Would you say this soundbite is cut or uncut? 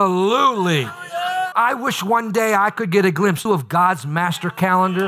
cut